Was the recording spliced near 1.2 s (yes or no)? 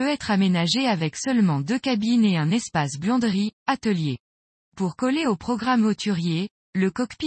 no